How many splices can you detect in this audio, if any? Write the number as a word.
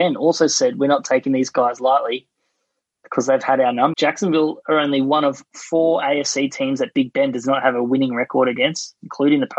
one